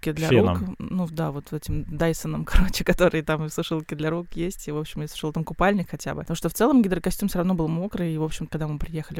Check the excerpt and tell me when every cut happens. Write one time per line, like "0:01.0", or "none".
none